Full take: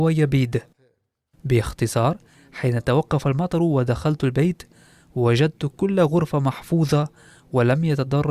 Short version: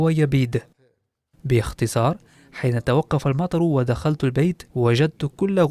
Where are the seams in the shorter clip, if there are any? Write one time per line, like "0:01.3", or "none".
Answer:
0:04.7